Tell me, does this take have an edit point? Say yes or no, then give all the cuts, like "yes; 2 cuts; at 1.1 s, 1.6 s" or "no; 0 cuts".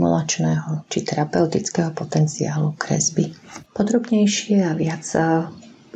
yes; 1 cut; at 3.6 s